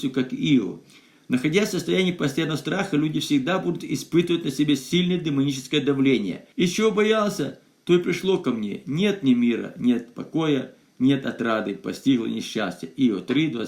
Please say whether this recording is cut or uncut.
cut